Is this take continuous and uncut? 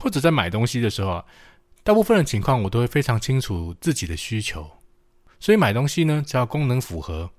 yes; 0 cuts

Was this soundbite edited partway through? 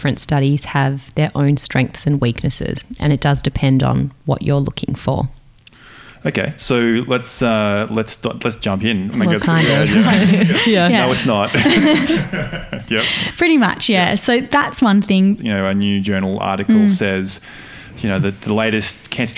yes; 2 cuts; at 9.1 s, 15.4 s

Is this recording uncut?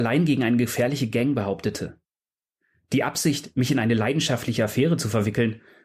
yes; 0 cuts

